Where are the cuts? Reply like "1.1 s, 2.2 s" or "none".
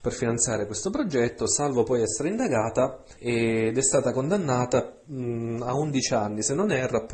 3.2 s